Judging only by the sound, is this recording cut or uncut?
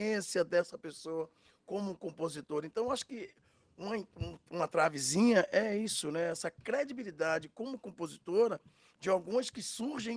uncut